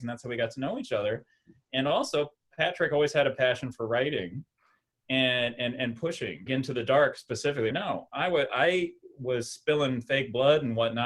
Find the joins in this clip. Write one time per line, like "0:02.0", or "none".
0:06.5
0:07.7